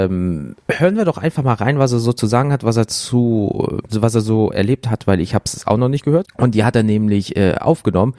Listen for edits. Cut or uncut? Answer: cut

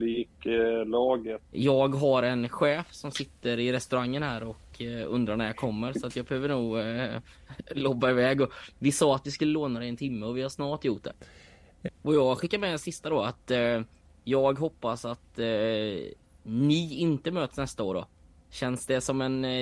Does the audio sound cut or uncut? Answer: cut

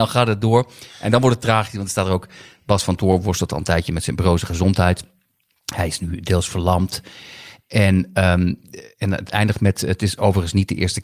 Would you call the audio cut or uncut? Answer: uncut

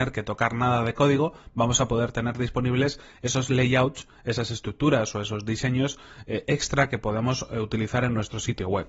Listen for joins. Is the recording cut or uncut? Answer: uncut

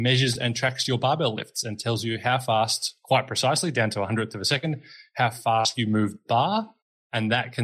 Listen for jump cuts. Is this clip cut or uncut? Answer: uncut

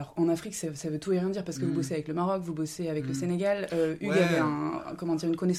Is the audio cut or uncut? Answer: uncut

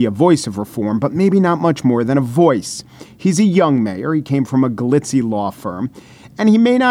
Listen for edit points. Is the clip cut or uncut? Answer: uncut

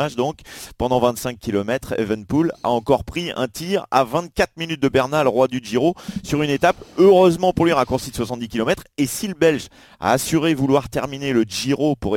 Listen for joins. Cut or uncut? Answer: uncut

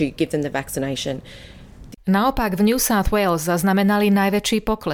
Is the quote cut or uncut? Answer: cut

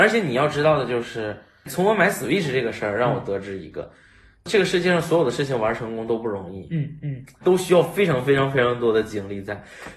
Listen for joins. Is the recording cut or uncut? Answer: cut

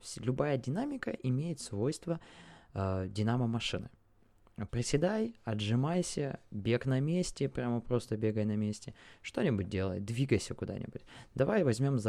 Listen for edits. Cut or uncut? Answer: cut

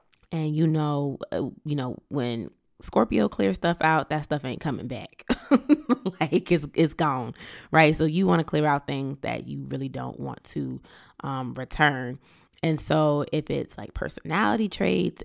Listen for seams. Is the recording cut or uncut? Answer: uncut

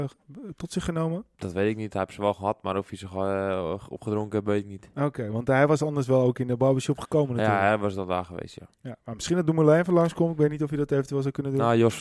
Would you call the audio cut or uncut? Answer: uncut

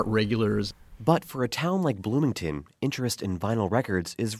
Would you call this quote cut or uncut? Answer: uncut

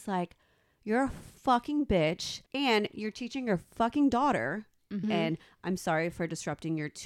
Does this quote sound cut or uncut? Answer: cut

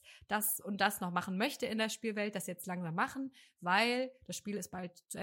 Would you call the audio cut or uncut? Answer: uncut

